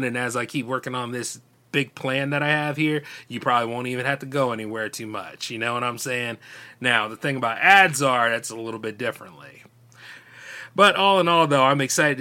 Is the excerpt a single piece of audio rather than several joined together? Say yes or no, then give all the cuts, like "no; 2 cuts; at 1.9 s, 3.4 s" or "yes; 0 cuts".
yes; 0 cuts